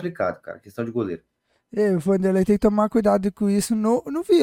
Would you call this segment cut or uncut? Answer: uncut